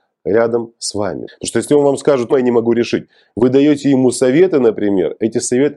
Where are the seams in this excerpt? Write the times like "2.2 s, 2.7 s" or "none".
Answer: 1.3 s, 2.3 s

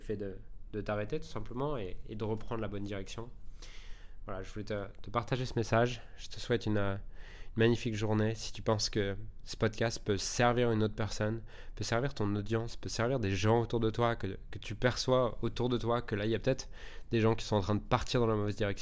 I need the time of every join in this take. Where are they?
none

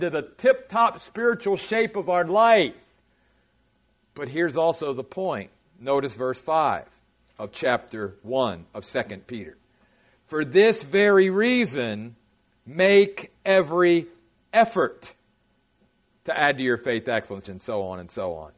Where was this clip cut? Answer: 13.4 s, 17.4 s

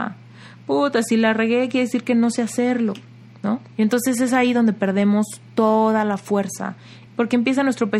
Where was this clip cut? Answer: 3.7 s, 7.1 s

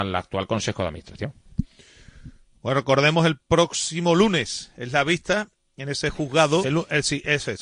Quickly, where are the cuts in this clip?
6.6 s

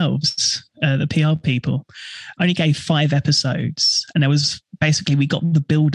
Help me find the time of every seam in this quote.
2.4 s

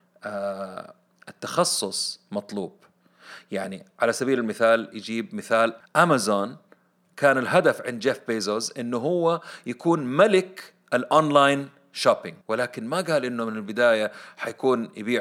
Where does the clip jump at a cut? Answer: 5.8 s, 12.4 s

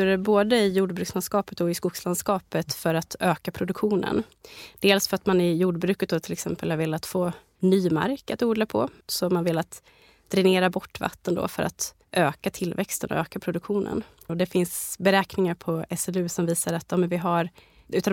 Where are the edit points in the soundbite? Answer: 9.0 s, 14.3 s

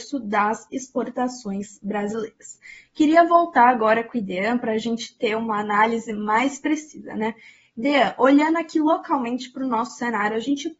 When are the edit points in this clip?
none

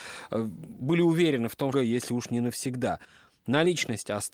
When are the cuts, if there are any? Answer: 1.7 s

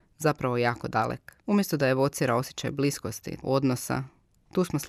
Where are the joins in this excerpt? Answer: 1.4 s, 3.4 s

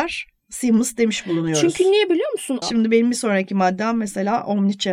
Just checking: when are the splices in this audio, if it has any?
2.6 s

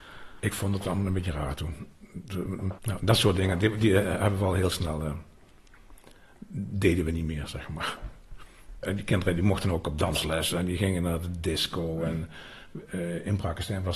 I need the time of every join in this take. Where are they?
2.8 s

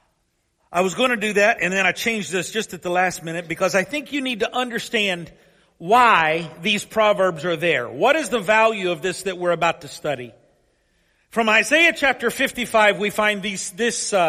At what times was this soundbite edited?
none

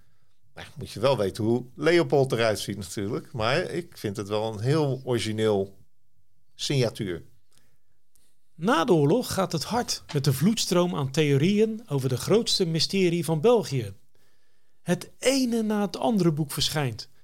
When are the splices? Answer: none

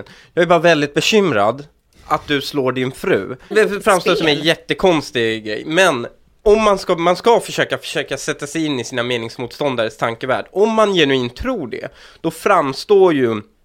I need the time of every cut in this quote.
3.5 s

